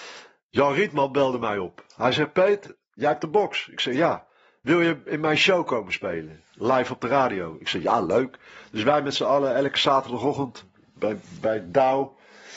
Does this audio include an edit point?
no; 0 cuts

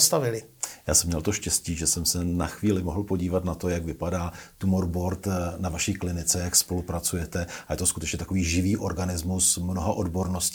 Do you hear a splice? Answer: no; 0 cuts

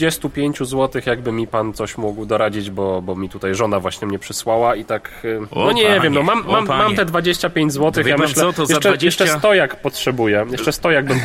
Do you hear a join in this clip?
no; 0 cuts

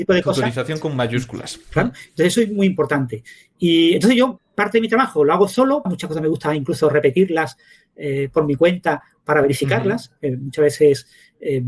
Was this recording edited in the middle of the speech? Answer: yes; 2 cuts; at 4.4 s, 5.8 s

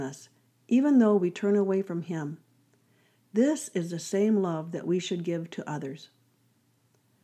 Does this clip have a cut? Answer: no; 0 cuts

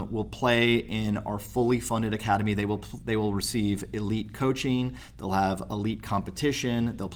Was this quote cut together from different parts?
no; 0 cuts

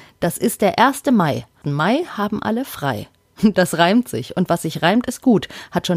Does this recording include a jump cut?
yes; 1 cut; at 1.6 s

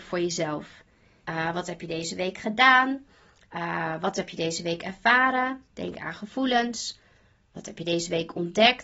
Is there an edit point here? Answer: yes; 2 cuts; at 1.2 s, 3.5 s

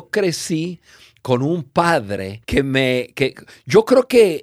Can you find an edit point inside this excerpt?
yes; 1 cut; at 2.4 s

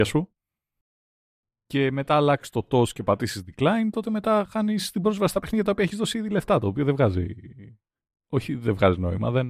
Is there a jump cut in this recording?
no; 0 cuts

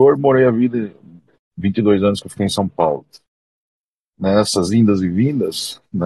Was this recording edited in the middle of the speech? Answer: no; 0 cuts

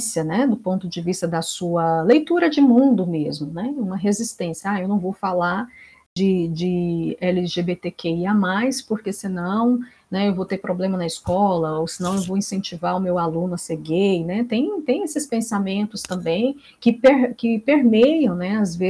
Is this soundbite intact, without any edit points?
yes; 0 cuts

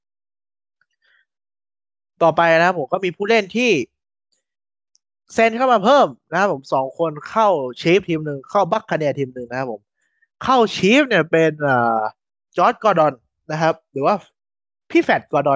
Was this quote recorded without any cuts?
yes; 0 cuts

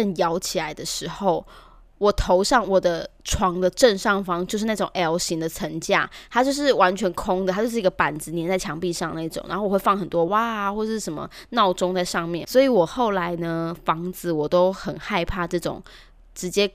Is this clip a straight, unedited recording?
no; 2 cuts; at 10.3 s, 12.4 s

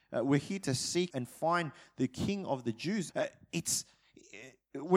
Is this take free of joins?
no; 2 cuts; at 1.1 s, 3.1 s

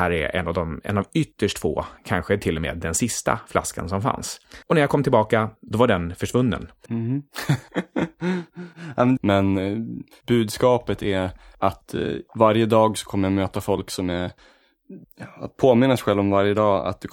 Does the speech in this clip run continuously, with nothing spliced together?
no; 2 cuts; at 6.9 s, 9.2 s

